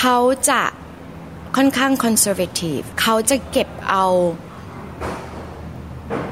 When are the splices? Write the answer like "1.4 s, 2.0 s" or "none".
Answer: 2.9 s